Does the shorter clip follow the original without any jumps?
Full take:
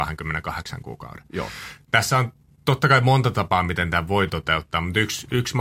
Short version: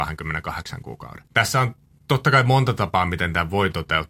no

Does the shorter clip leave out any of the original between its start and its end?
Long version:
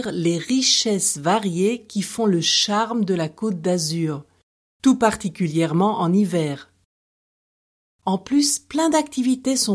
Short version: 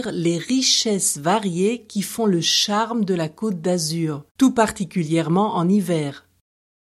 yes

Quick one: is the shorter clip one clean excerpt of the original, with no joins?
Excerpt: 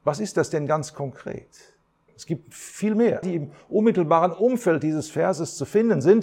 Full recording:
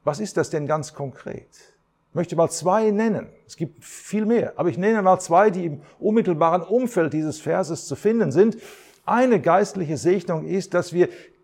no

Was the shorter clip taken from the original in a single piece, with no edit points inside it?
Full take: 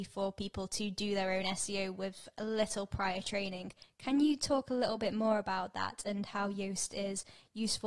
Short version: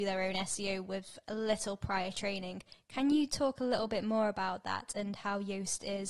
yes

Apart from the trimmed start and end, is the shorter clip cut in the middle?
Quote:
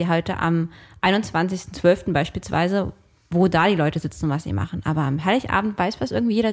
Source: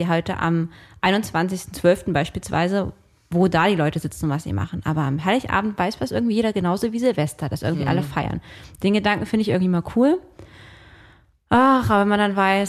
no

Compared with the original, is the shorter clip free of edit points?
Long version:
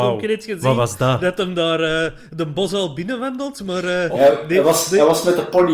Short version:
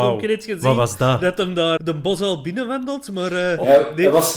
no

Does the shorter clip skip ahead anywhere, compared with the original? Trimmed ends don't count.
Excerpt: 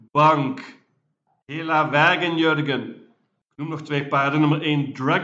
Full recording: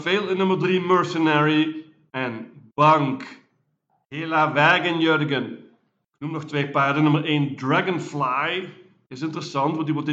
no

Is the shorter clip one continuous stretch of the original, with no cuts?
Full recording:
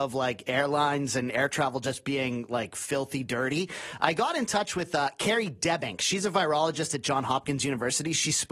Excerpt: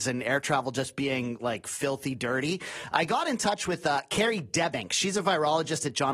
yes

